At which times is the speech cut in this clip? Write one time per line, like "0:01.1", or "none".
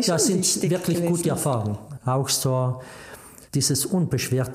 0:03.5